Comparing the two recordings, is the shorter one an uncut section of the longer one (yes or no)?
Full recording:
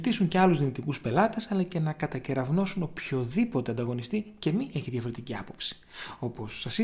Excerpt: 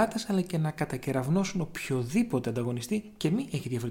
yes